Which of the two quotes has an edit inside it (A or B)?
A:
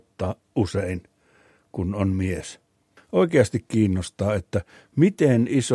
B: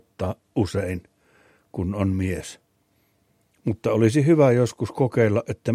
A